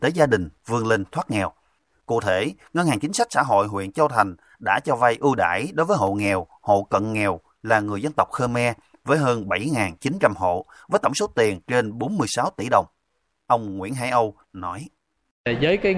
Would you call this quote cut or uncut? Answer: cut